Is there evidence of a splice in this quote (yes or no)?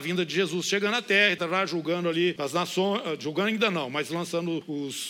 yes